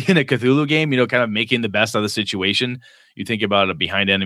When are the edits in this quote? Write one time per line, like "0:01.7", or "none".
none

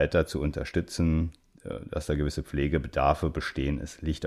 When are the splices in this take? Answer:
none

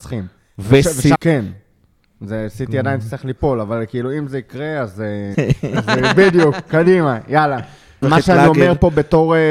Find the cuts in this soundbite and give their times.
0:01.1
0:05.3
0:08.0

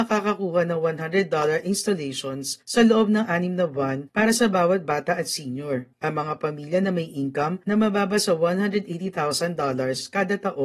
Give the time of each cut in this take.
none

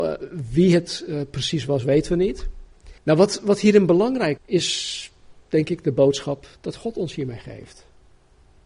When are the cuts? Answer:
0:03.0
0:04.4

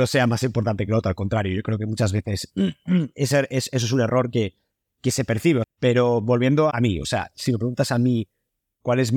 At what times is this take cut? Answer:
0:05.6
0:06.7

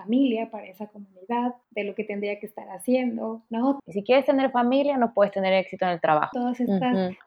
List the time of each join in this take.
0:01.6
0:03.8
0:06.3

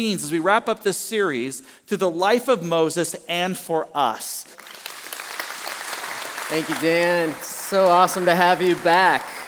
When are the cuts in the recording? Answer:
0:04.5

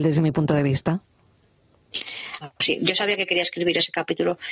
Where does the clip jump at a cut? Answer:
0:02.4

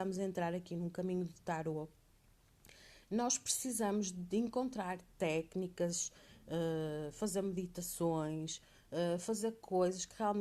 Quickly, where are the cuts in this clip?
none

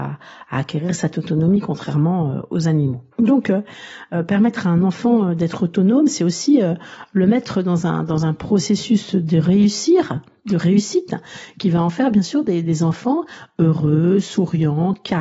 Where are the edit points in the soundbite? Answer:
0:03.1

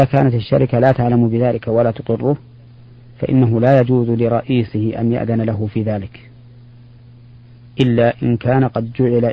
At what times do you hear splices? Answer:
none

